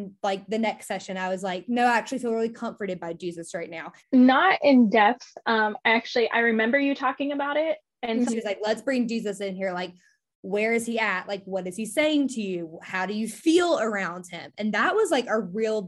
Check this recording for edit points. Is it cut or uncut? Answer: cut